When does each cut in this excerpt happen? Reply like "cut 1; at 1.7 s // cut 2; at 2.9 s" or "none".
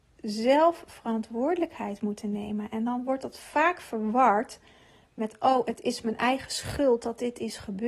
none